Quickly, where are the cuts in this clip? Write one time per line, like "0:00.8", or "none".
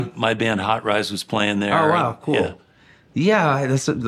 none